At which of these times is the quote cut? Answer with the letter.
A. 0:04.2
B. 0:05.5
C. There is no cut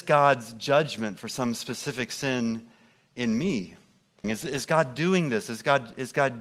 A